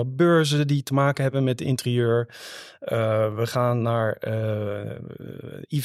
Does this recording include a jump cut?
no; 0 cuts

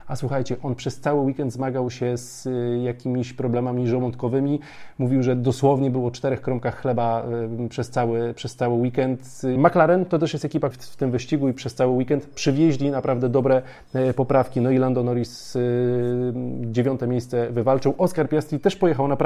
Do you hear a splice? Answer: yes; 2 cuts; at 9.6 s, 10.7 s

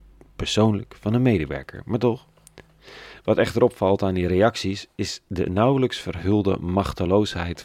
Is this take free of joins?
yes; 0 cuts

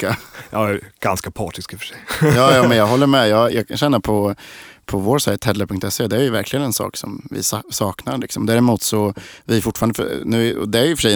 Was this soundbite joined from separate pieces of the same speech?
no; 0 cuts

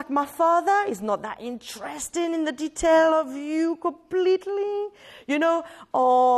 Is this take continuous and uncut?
yes; 0 cuts

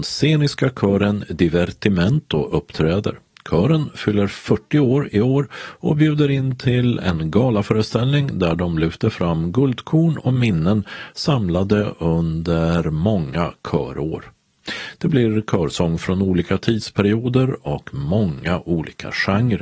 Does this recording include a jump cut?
no; 0 cuts

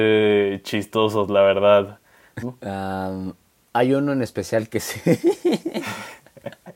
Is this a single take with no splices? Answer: no; 1 cut; at 2.4 s

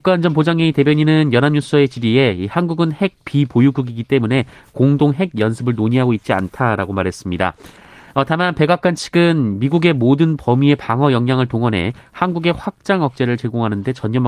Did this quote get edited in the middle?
no; 0 cuts

